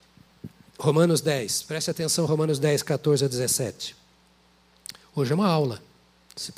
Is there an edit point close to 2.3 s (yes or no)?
no